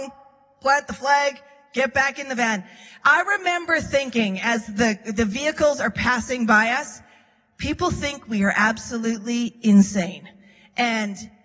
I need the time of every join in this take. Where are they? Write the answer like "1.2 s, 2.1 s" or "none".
none